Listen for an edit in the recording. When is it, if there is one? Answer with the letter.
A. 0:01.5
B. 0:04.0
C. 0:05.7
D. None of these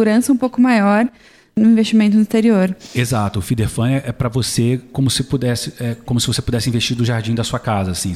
B